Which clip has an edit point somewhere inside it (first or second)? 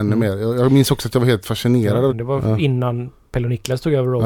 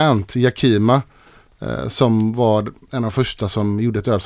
first